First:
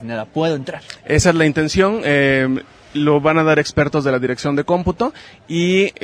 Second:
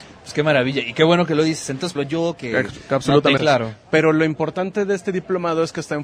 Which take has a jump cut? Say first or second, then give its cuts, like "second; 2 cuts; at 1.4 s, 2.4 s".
second; 2 cuts; at 1.9 s, 3.4 s